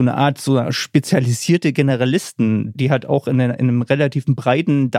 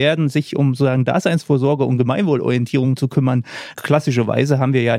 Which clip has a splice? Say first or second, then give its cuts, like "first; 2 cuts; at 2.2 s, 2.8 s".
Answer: second; 1 cut; at 3.7 s